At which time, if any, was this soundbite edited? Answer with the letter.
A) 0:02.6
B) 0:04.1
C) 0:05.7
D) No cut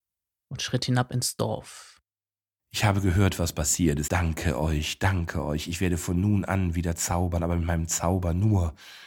B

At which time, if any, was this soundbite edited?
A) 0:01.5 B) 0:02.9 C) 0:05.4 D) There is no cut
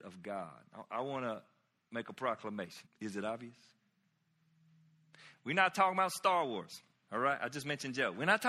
B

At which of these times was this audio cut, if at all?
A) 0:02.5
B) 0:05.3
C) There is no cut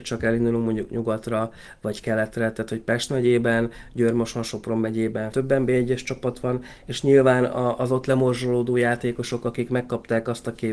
B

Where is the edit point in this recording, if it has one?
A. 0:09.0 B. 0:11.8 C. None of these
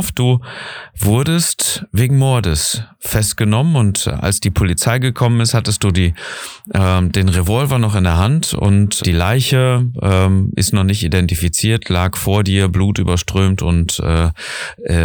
A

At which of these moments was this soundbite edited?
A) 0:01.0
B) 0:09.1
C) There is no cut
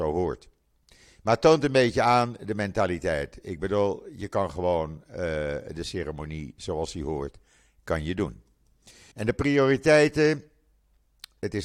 B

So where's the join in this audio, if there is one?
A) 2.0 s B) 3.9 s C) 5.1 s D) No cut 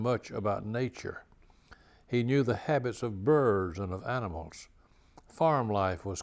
D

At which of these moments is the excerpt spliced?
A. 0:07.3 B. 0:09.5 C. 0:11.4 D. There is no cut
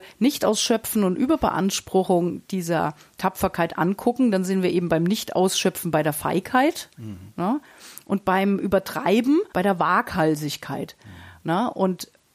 B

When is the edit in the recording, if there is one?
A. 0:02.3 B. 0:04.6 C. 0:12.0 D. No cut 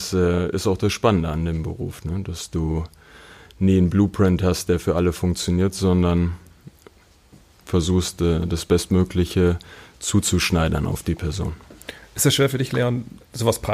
D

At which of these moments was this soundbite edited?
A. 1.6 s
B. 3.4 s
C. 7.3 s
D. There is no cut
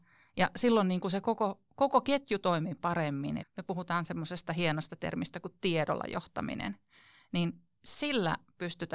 B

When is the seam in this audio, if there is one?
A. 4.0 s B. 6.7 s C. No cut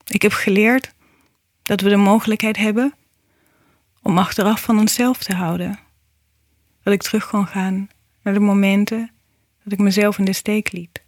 B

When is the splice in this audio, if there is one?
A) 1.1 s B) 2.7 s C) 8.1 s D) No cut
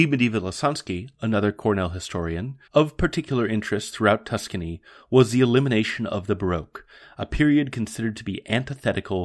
B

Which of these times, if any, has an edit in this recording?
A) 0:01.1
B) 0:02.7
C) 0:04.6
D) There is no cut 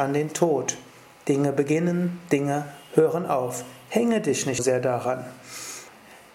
C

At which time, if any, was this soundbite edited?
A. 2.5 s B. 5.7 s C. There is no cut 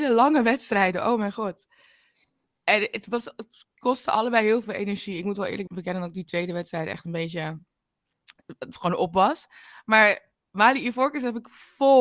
B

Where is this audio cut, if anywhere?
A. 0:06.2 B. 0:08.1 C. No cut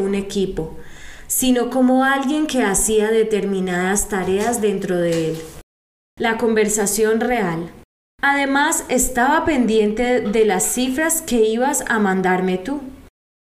A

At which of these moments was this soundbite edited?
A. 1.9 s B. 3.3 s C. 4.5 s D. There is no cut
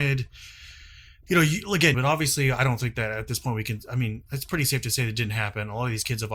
A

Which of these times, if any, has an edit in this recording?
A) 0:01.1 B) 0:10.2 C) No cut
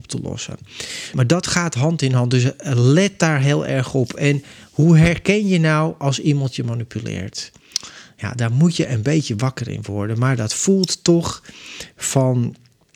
A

